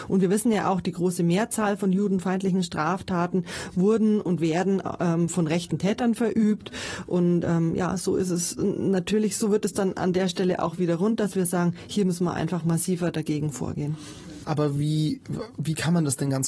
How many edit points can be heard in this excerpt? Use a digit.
1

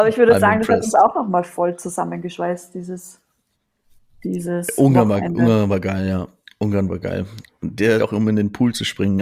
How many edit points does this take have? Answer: 1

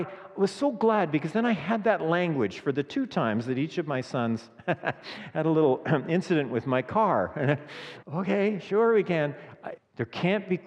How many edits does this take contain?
2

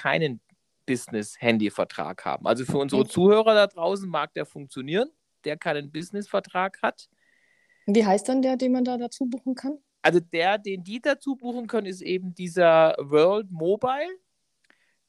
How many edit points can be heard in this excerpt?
1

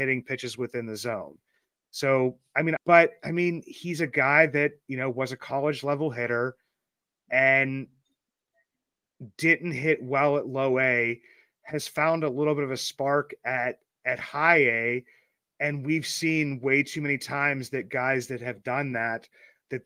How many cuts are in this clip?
1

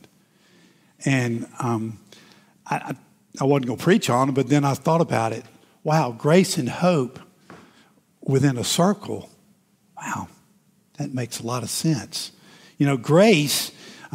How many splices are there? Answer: 0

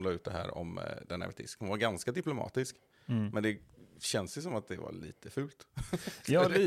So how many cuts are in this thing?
0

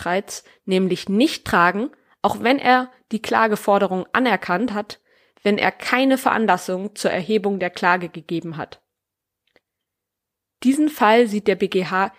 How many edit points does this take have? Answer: 0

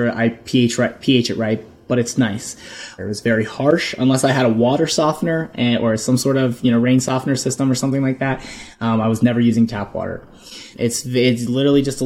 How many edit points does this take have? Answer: 2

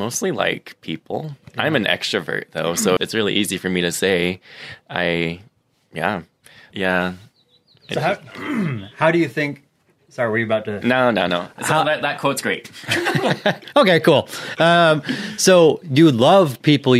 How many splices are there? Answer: 2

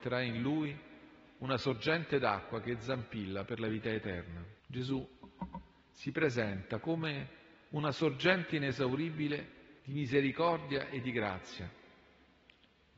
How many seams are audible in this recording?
2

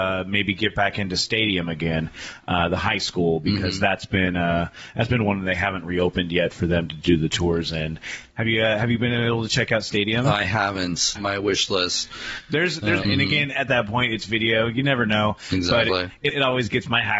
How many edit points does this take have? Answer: 3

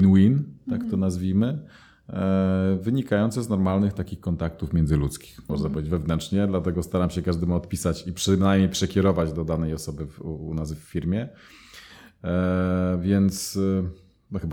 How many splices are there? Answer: 1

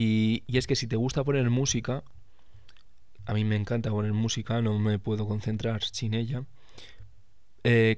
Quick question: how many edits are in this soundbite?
0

